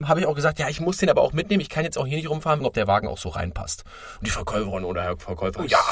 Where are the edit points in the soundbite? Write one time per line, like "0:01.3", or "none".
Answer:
0:02.6
0:04.2